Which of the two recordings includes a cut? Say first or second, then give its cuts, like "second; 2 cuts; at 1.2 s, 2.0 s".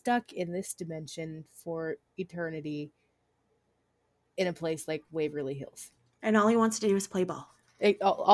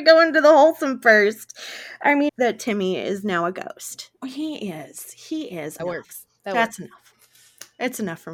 second; 3 cuts; at 2.3 s, 4.2 s, 5.8 s